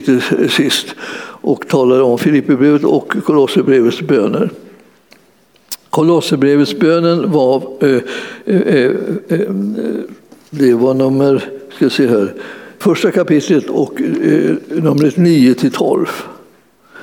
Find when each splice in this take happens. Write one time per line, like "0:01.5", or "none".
0:12.8